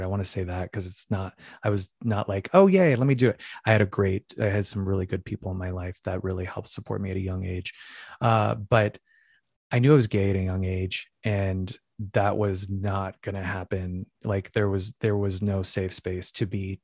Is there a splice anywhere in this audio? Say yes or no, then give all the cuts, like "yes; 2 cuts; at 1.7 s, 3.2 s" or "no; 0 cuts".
no; 0 cuts